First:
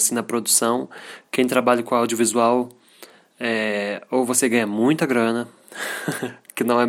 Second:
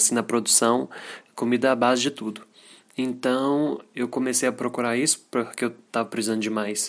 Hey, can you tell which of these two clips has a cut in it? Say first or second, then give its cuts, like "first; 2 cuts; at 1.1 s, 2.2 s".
second; 1 cut; at 1.3 s